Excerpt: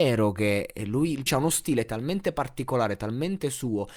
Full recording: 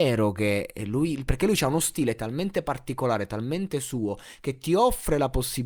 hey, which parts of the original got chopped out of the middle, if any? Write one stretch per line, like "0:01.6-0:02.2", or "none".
0:01.3-0:01.6